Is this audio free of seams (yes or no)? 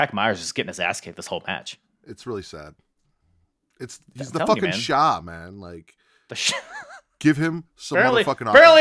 yes